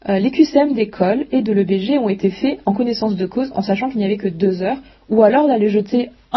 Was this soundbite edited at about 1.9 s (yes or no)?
no